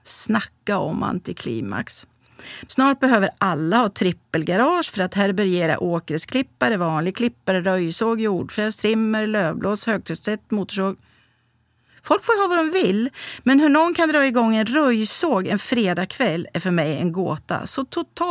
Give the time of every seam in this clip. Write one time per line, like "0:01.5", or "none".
0:02.7